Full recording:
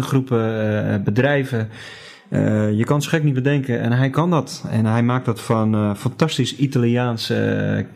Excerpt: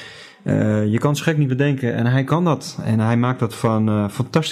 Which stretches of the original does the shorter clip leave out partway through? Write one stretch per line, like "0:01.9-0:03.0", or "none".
none